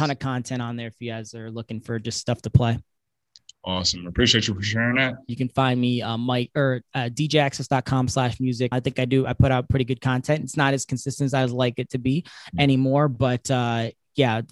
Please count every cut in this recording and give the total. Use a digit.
2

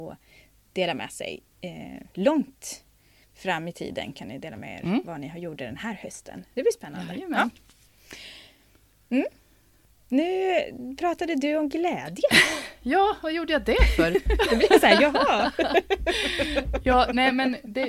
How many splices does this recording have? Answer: 0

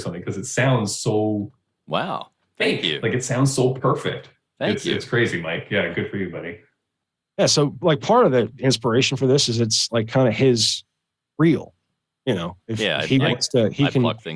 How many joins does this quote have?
0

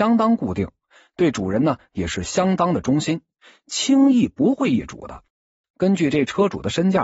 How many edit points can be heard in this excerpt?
1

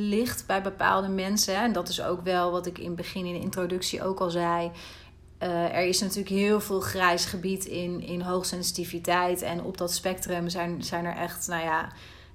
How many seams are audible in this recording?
0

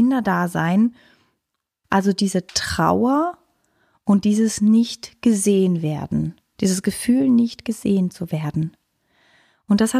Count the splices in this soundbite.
1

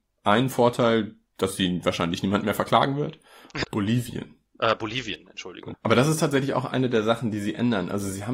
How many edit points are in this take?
2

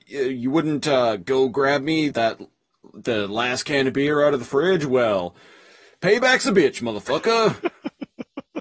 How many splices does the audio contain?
1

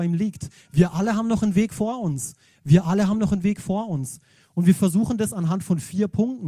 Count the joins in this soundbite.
0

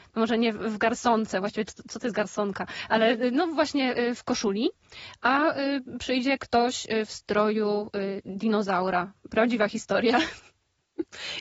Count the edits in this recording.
0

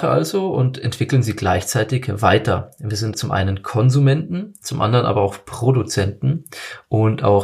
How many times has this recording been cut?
1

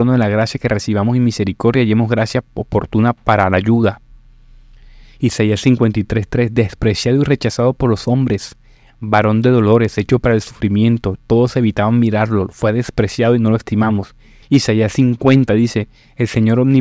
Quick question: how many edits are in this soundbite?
1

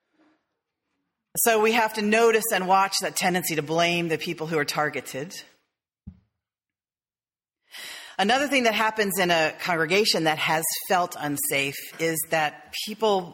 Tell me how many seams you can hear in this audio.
0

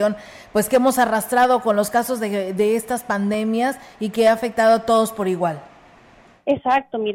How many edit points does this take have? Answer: 0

